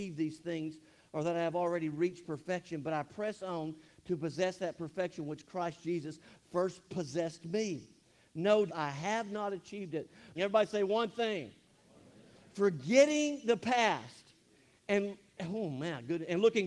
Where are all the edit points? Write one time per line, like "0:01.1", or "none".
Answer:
0:08.7
0:10.4